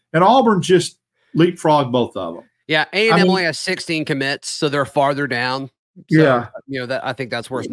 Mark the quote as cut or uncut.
uncut